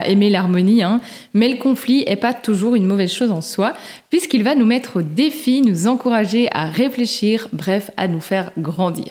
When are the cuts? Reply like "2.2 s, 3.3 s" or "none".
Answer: none